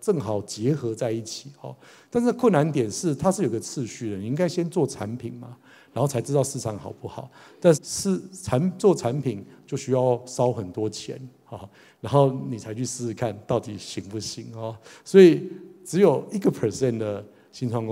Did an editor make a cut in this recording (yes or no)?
yes